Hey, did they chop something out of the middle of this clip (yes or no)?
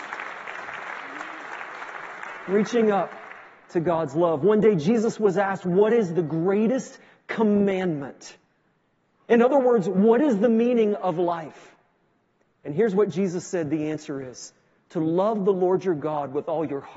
no